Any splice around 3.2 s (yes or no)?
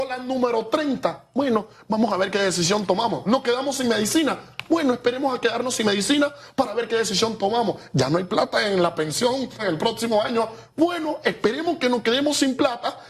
no